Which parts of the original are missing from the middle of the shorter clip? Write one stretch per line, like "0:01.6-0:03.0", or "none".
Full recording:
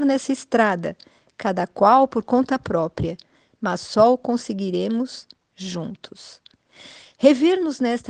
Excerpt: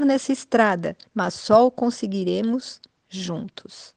0:01.0-0:03.5